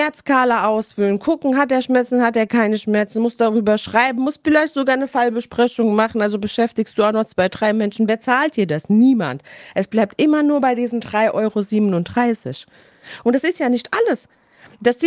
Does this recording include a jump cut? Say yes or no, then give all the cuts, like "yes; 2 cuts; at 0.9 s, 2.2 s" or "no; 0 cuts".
no; 0 cuts